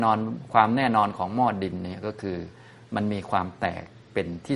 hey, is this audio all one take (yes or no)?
yes